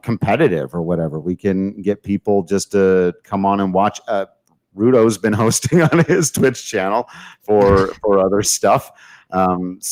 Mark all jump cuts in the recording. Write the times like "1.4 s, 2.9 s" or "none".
none